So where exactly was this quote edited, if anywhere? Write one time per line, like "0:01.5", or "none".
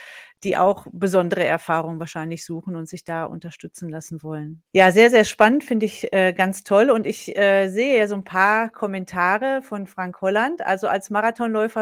0:04.7